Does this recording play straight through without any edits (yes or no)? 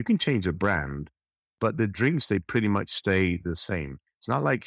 yes